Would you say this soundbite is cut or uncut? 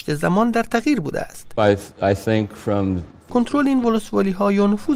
cut